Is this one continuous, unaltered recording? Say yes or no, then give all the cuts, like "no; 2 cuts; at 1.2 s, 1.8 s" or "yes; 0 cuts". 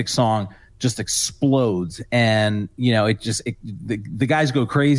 yes; 0 cuts